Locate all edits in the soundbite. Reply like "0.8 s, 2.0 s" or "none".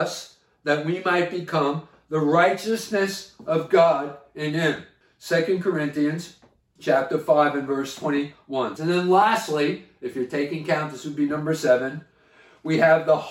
8.8 s